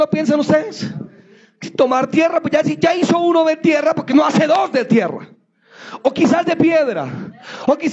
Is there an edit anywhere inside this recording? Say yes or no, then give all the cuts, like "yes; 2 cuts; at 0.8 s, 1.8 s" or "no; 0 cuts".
no; 0 cuts